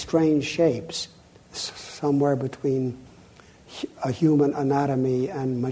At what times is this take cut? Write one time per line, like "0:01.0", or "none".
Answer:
none

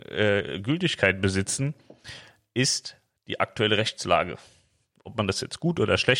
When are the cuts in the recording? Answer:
none

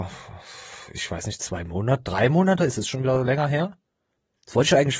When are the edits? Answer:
none

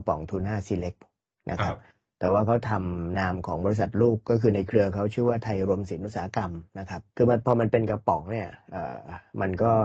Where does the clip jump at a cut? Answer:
0:03.1
0:07.1

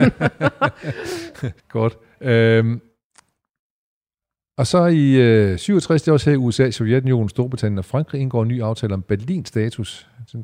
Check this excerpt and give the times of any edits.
0:01.6

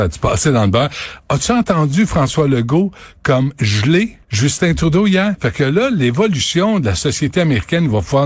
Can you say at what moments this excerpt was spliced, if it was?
0:04.2
0:05.3

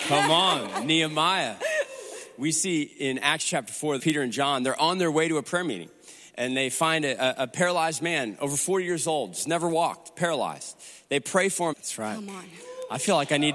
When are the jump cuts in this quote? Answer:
0:04.0
0:11.7

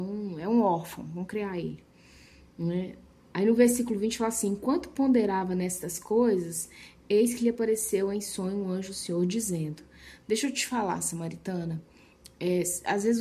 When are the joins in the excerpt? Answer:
none

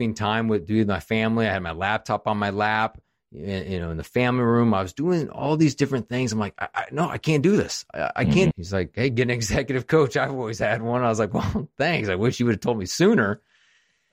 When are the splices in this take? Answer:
0:08.5

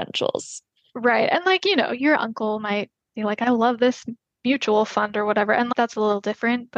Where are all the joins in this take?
none

